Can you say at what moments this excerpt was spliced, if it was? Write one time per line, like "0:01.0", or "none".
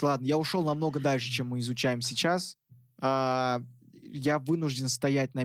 none